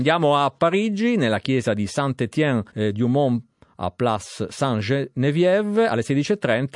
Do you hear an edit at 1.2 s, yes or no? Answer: no